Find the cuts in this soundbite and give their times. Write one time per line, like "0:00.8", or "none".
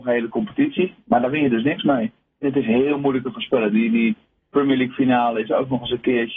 0:02.4